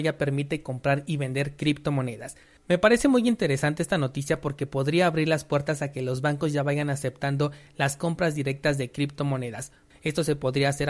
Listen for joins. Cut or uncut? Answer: cut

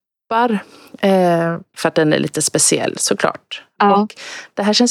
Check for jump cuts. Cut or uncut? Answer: cut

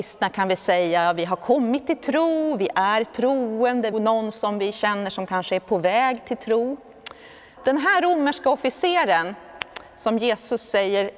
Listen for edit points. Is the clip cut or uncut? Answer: cut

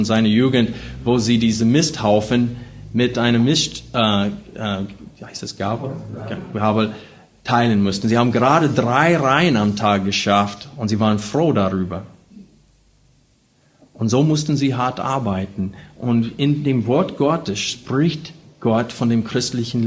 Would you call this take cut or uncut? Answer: uncut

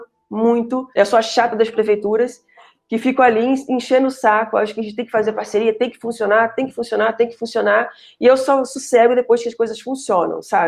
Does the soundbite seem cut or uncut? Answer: cut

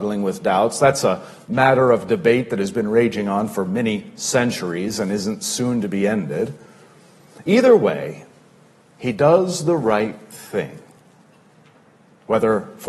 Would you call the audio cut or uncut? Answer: uncut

